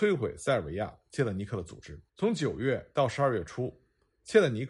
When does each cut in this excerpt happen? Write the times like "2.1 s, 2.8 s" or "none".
2.1 s